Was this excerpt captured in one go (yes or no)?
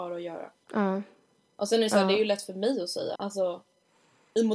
no